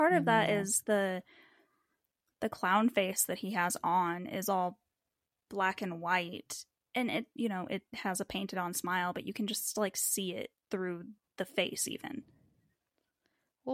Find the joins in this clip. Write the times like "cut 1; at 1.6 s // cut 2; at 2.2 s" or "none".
none